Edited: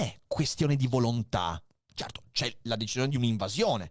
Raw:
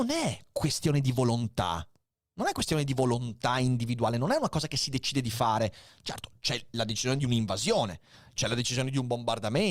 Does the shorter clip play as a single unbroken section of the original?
no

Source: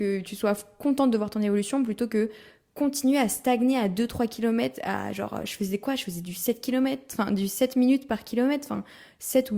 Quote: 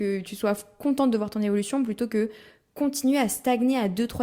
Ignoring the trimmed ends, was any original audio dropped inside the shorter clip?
no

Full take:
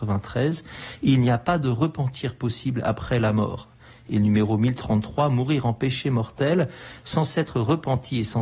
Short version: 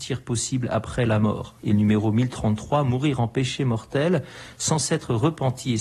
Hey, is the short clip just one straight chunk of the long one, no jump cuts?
no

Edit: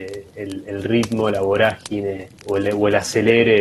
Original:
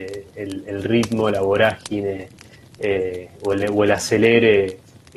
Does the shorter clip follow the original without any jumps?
no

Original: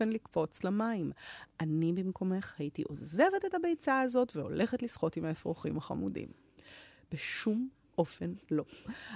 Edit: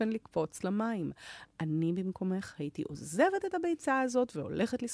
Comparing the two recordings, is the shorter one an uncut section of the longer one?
yes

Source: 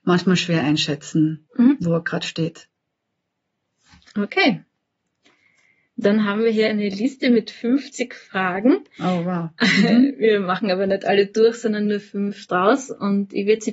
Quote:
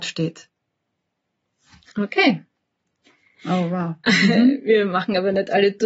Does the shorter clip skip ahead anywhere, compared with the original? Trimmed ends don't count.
yes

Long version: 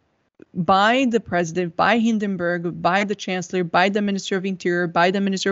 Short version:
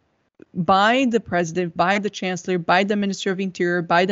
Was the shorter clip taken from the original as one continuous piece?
no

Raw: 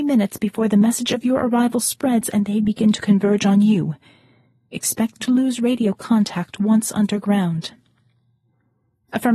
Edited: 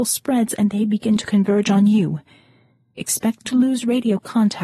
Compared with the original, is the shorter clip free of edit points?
yes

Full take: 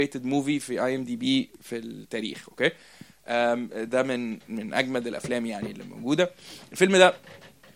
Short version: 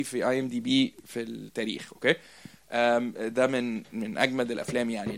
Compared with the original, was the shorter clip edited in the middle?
no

